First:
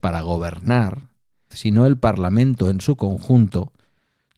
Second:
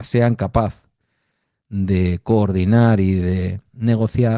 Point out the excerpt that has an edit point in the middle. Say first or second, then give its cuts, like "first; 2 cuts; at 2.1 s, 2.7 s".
first; 1 cut; at 1.5 s